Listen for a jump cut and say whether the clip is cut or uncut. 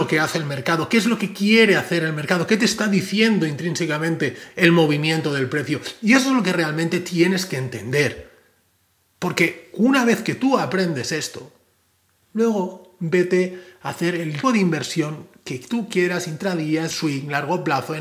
cut